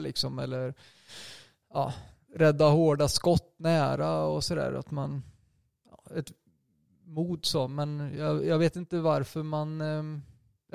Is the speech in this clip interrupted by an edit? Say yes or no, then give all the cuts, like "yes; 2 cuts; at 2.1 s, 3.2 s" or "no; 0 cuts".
no; 0 cuts